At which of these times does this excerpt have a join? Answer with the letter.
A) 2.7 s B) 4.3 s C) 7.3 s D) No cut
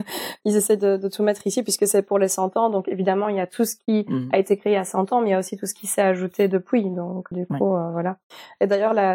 C